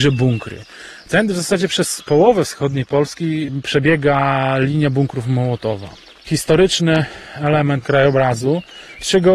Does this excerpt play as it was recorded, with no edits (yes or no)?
no